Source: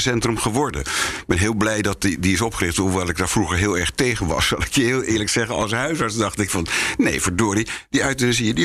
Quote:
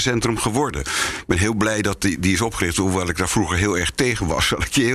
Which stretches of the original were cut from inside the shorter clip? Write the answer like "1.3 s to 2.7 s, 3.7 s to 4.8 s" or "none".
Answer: none